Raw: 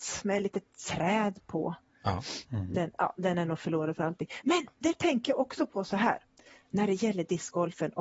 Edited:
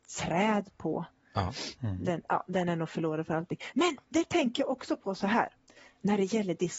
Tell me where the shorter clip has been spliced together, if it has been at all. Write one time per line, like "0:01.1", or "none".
none